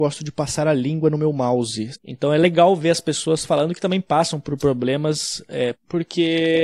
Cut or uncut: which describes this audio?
cut